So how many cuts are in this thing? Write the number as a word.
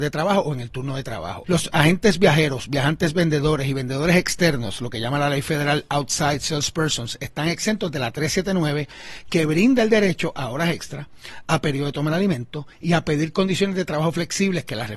one